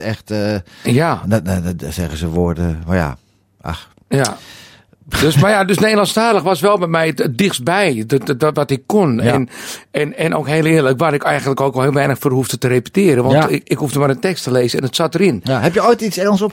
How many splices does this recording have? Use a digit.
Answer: 1